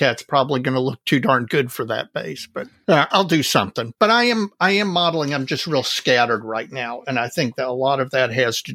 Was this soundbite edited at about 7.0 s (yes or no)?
no